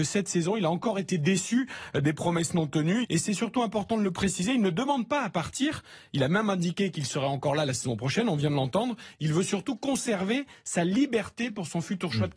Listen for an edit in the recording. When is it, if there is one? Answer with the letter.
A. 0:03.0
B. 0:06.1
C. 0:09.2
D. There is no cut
A